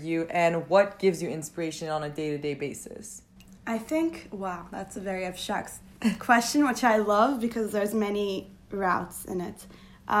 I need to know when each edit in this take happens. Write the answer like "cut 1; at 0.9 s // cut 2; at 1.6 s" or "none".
none